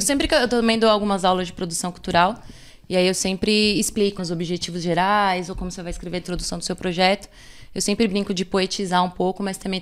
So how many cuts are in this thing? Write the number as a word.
one